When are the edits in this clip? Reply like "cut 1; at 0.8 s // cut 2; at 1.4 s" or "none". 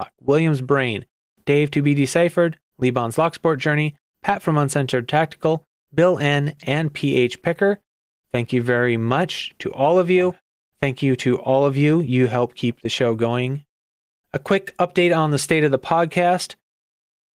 cut 1; at 10.6 s